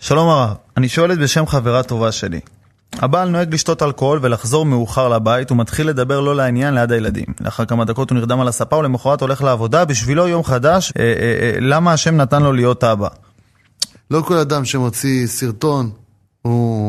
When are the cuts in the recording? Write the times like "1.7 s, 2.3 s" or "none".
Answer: 10.9 s, 13.9 s